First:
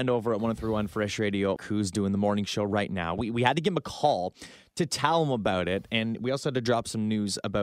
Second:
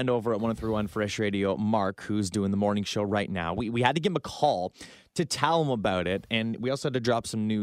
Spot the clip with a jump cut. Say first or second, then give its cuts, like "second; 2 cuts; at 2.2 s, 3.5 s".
first; 1 cut; at 1.6 s